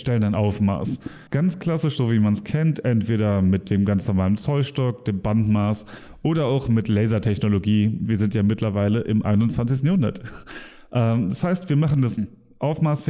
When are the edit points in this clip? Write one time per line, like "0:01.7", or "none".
0:01.3